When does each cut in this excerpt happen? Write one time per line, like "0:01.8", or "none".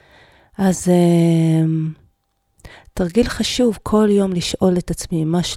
none